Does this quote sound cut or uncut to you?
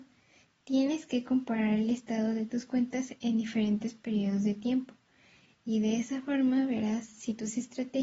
uncut